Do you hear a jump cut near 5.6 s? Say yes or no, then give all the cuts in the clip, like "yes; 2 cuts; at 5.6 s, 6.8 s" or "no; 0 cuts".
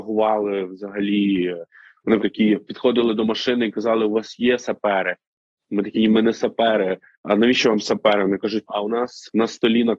no; 2 cuts; at 2.2 s, 8.7 s